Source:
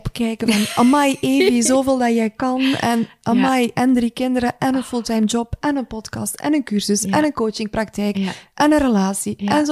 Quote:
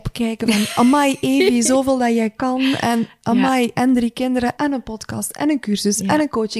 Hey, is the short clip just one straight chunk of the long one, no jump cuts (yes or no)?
no